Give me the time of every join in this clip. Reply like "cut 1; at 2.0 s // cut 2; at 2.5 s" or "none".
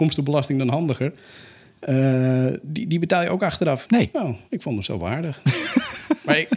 cut 1; at 3.9 s